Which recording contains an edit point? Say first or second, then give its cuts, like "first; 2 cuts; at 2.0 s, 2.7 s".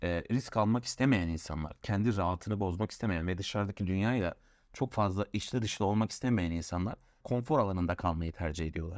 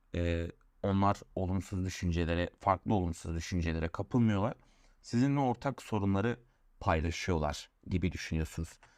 first; 1 cut; at 7.2 s